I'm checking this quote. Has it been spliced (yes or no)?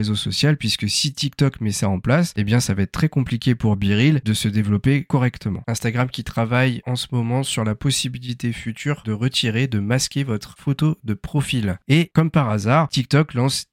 yes